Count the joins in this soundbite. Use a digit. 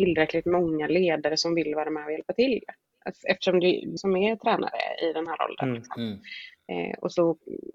1